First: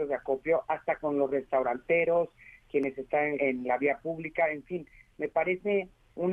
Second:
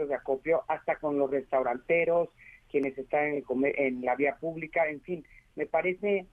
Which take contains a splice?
first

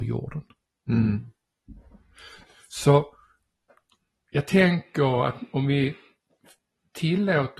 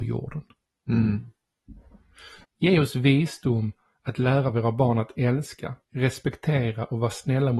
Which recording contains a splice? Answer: second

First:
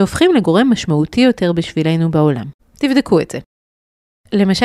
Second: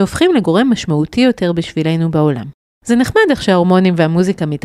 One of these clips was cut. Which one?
first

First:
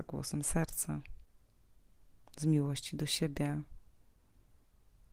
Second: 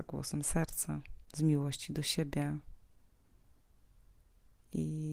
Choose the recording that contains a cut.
second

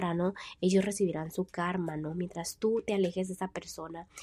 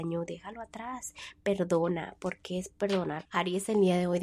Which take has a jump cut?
second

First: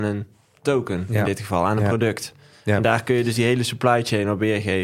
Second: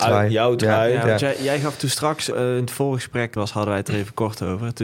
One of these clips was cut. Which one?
second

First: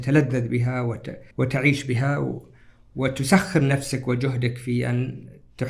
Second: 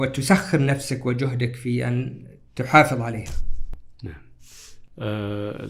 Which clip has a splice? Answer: first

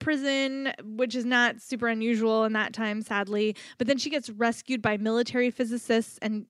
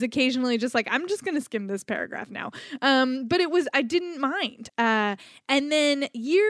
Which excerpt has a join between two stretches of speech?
second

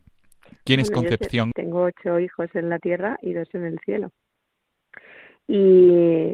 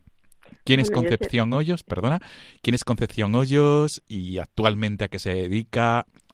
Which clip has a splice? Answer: first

